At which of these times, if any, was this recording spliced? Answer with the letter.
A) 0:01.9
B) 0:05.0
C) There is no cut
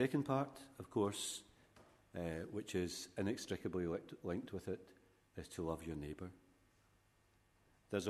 C